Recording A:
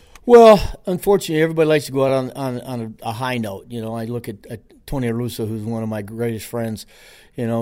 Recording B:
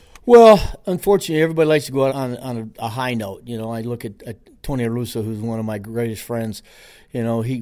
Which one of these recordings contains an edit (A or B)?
B